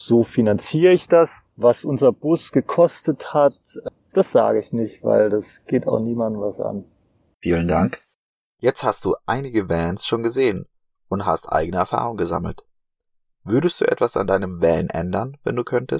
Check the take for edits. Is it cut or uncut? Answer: uncut